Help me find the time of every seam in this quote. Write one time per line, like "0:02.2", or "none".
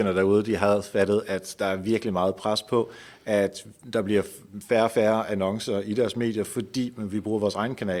none